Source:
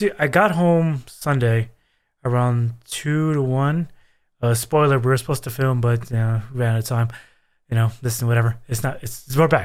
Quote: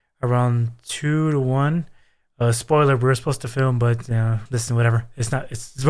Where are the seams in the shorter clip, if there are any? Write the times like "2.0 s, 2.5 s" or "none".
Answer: 4.5 s